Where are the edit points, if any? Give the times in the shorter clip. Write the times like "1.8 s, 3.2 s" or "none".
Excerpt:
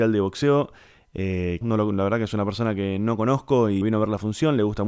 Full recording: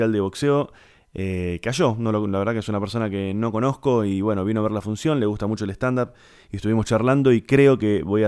1.6 s, 3.8 s